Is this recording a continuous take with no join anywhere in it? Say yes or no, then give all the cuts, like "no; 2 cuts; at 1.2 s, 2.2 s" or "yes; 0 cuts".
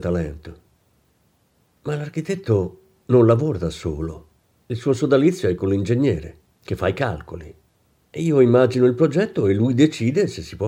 yes; 0 cuts